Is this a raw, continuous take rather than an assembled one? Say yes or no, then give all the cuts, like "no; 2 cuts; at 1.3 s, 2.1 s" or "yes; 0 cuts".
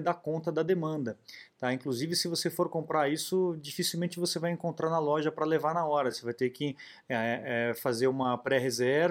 yes; 0 cuts